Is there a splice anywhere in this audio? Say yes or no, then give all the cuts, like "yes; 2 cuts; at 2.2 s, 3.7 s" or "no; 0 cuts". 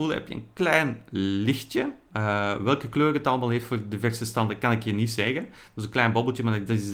no; 0 cuts